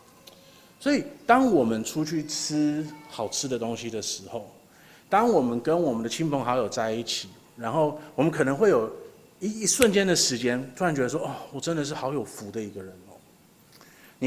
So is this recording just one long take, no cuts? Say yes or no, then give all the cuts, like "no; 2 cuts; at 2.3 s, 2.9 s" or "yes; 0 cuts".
yes; 0 cuts